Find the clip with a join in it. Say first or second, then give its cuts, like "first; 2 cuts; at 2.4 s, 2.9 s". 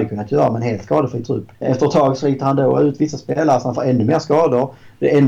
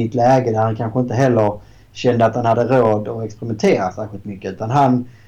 first; 1 cut; at 1.5 s